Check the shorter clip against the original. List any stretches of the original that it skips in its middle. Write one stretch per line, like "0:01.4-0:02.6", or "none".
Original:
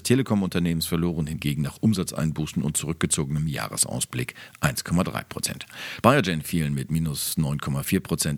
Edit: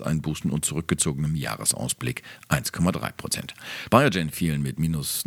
none